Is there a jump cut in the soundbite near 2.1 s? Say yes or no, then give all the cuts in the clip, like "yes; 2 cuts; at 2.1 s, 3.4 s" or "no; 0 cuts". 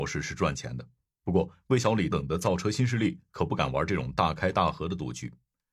yes; 1 cut; at 2.1 s